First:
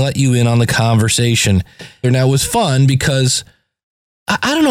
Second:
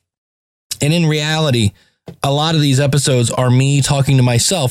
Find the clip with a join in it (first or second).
first